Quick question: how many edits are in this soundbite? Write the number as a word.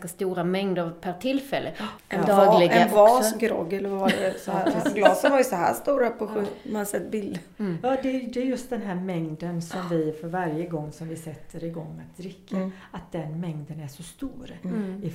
one